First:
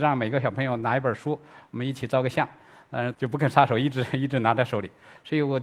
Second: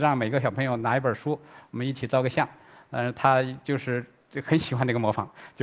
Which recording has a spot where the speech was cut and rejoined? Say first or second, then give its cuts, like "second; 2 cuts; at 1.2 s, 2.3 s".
first; 1 cut; at 3.1 s